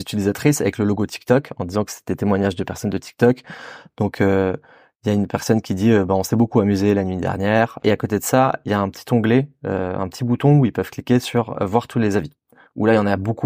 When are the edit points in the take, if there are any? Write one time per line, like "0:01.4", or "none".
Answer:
0:07.8